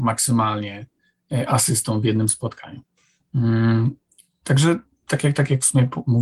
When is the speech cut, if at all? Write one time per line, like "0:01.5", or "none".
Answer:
none